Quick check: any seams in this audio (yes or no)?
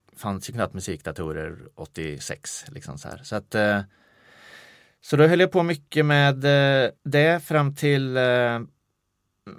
yes